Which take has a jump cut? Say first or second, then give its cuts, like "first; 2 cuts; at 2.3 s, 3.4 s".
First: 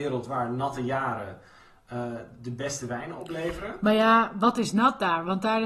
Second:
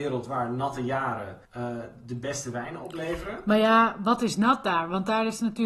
second; 1 cut; at 1.5 s